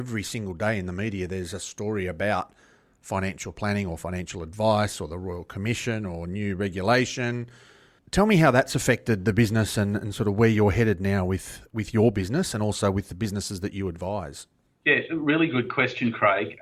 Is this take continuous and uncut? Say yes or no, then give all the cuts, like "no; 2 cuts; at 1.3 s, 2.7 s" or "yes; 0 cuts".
yes; 0 cuts